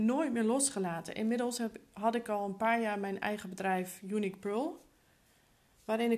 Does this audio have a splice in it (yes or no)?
no